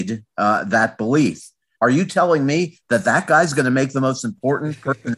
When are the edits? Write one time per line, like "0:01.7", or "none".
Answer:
0:01.8